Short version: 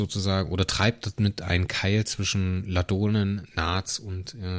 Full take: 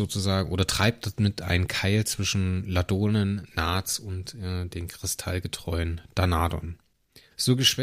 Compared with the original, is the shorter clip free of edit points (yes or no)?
yes